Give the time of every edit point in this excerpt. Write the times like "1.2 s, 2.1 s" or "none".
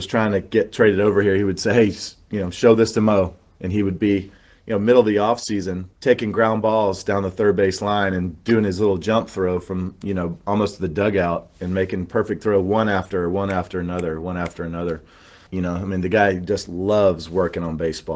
5.9 s, 15.5 s